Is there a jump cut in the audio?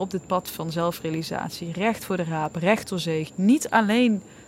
yes; 1 cut; at 3.3 s

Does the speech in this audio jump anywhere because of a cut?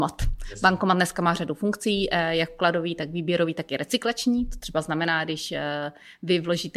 no; 0 cuts

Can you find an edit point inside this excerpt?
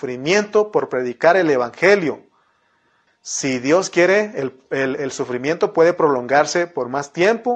yes; 2 cuts; at 3.1 s, 5.0 s

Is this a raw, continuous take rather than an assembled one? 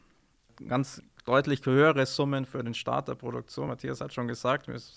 yes; 0 cuts

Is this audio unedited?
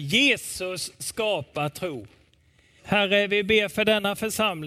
no; 1 cut; at 2.8 s

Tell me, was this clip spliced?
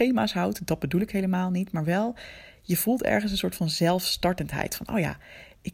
no; 0 cuts

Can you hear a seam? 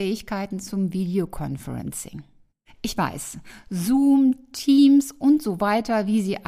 no; 0 cuts

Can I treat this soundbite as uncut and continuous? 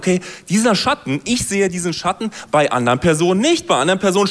yes; 0 cuts

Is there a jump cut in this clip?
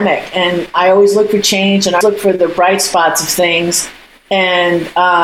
yes; 1 cut; at 2.0 s

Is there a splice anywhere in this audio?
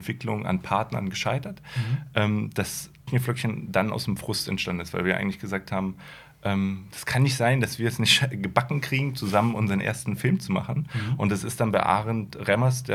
yes; 1 cut; at 3.1 s

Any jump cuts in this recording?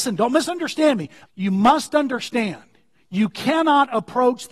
yes; 1 cut; at 1.2 s

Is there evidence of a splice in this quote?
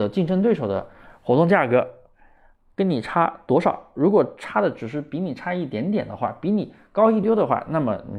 yes; 1 cut; at 7.2 s

